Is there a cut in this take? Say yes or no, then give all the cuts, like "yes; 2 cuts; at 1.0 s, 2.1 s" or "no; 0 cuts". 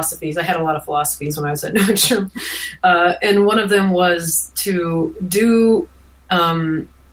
no; 0 cuts